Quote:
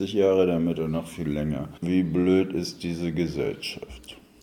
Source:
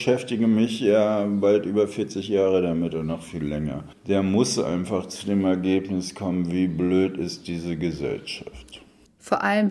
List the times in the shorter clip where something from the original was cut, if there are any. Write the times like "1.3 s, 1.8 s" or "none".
1.8 s